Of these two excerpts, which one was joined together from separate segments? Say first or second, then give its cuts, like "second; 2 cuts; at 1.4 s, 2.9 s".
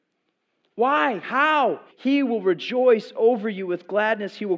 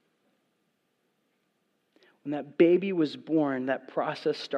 first; 1 cut; at 1.9 s